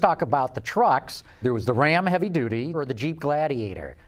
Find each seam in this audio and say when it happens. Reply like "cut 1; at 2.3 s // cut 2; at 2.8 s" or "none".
cut 1; at 1.4 s // cut 2; at 2.7 s